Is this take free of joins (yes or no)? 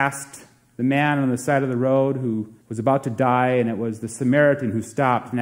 no